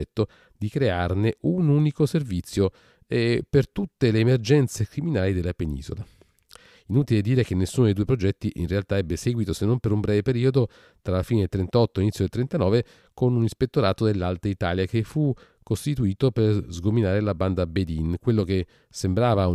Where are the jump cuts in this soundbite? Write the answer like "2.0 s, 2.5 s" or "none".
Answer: none